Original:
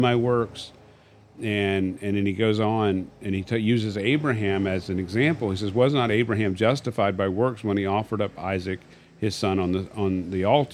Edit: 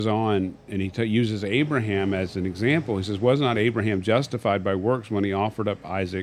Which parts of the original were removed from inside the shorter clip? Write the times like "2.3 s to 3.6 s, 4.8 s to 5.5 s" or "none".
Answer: none